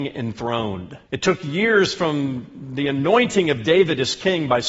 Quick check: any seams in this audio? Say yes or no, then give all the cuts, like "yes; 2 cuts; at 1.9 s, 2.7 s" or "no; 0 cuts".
yes; 1 cut; at 1.0 s